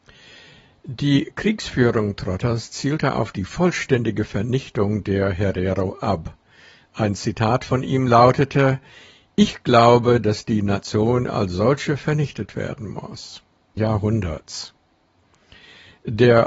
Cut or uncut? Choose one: cut